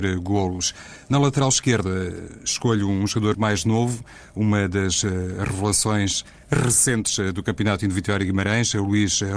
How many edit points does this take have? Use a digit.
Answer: 1